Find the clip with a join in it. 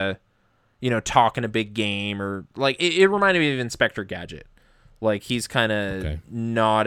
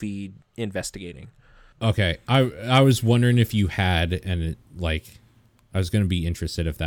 second; 1 cut; at 1.7 s

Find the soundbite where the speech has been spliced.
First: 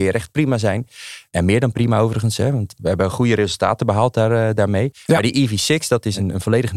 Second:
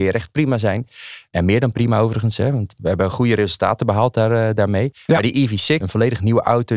second; 1 cut; at 5.8 s

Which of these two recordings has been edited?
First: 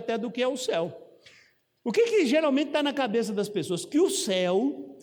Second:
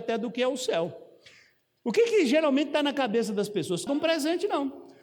second; 1 cut; at 3.9 s

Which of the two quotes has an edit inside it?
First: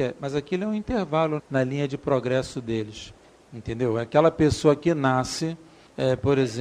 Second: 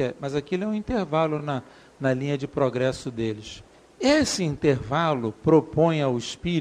first; 2 cuts; at 1.4 s, 3.4 s

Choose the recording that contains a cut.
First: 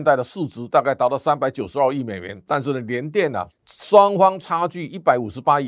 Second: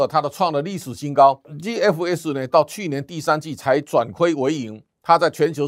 first; 1 cut; at 3.5 s

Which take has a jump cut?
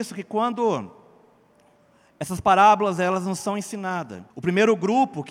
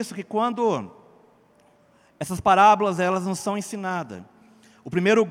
first; 1 cut; at 4.3 s

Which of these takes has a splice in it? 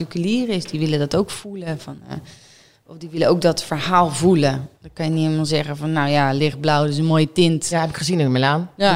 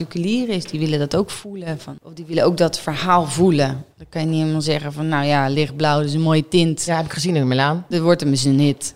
second; 2 cuts; at 2.0 s, 7.9 s

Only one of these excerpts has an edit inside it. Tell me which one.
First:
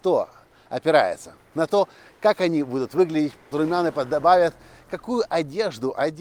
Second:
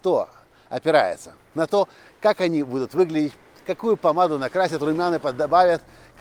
first; 1 cut; at 3.5 s

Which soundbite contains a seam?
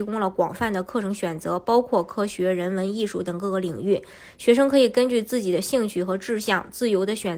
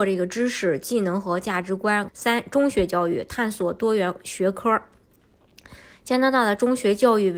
second; 1 cut; at 2.1 s

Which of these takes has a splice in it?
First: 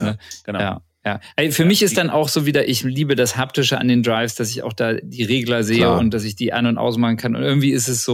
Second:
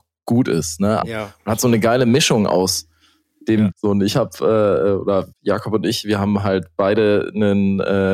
second; 3 cuts; at 1.0 s, 3.7 s, 5.3 s

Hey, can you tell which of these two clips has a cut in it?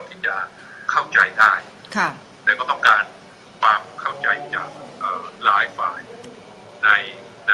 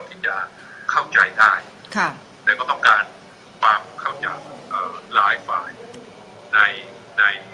second; 1 cut; at 4.2 s

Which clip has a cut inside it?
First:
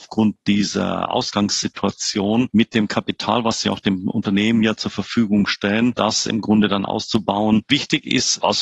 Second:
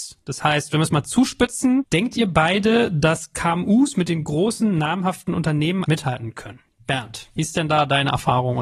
second; 1 cut; at 5.8 s

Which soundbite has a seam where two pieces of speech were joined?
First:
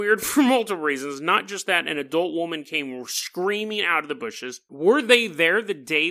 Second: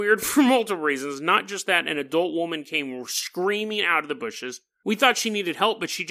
first; 1 cut; at 4.7 s

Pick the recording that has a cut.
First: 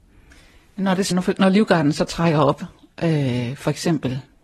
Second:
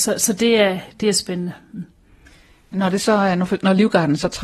first; 1 cut; at 1.1 s

